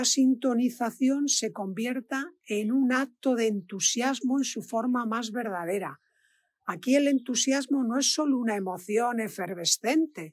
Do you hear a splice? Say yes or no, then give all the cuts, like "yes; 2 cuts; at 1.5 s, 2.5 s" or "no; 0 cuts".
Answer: no; 0 cuts